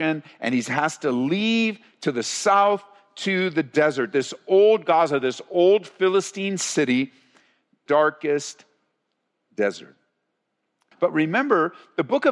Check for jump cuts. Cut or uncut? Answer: cut